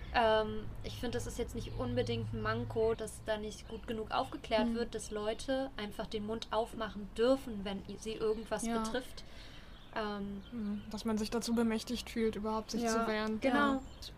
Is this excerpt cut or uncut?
cut